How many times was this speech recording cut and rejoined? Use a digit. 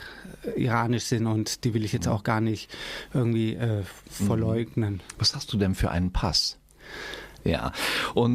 1